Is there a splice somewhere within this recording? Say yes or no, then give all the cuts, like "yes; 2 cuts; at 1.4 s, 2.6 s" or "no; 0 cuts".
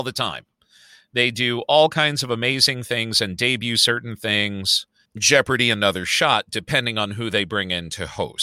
yes; 1 cut; at 5.0 s